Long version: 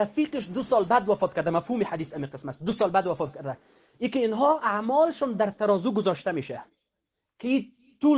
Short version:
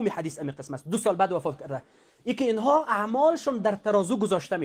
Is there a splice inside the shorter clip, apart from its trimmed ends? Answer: no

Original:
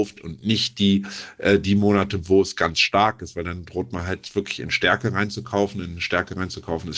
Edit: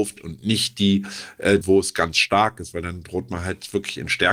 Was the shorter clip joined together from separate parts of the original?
yes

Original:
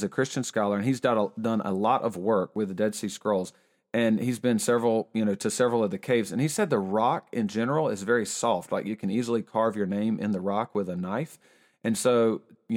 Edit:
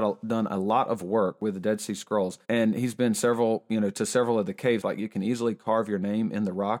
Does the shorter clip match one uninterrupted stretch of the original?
no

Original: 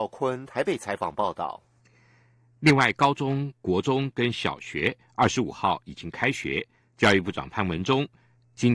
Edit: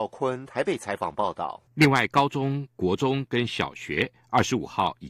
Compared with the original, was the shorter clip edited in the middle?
yes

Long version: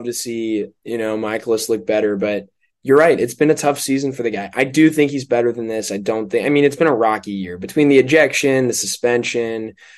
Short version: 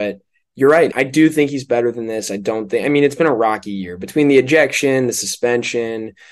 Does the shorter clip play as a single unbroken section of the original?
no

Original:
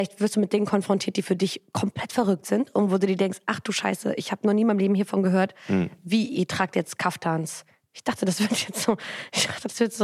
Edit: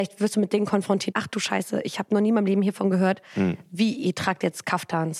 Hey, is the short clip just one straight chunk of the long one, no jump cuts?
no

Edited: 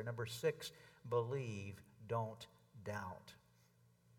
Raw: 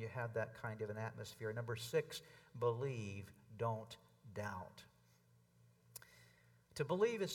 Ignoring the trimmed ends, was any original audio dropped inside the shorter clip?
no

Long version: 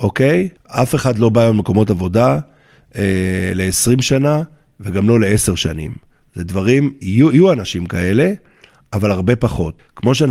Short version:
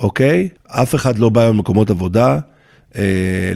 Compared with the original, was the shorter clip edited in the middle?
no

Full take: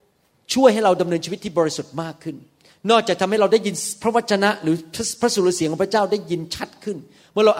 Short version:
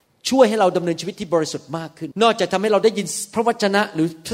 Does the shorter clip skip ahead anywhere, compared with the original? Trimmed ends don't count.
yes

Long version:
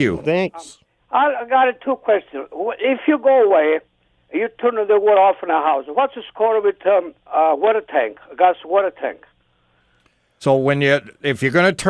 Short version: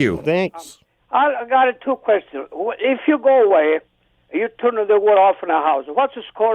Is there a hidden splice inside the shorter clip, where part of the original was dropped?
no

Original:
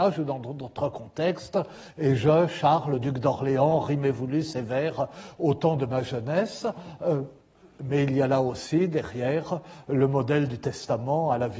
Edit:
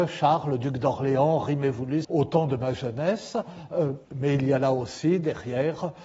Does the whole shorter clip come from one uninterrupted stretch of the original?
no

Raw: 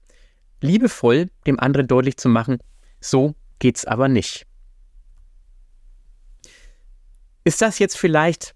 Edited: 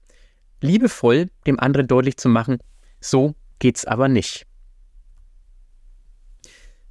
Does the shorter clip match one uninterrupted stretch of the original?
yes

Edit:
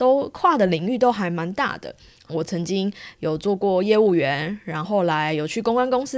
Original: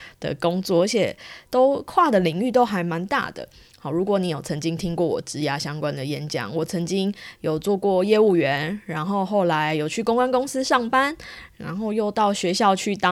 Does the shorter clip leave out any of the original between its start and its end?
yes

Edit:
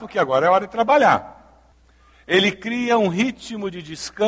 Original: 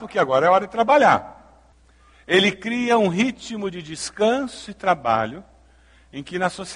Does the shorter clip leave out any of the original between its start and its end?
no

